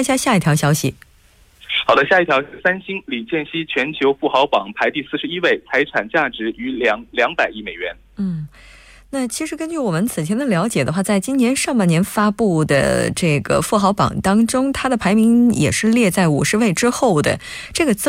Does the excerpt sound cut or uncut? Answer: uncut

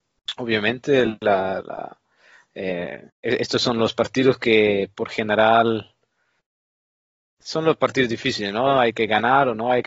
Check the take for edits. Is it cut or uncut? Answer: cut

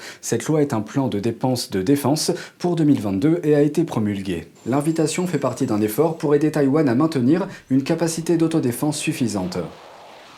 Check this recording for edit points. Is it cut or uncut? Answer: cut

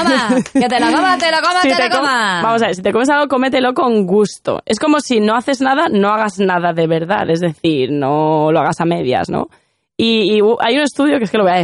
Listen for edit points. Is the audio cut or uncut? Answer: uncut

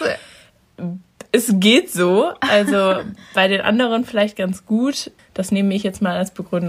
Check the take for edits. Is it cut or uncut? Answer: cut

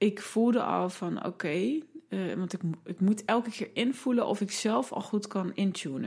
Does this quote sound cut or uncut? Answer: uncut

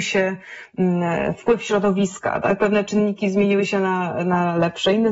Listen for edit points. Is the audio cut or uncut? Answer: uncut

